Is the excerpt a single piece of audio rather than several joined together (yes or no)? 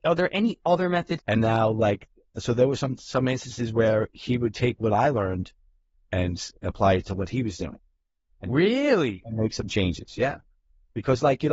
no